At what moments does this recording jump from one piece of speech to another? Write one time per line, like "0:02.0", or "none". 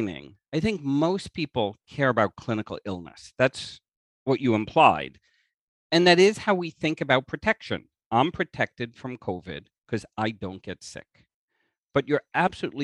none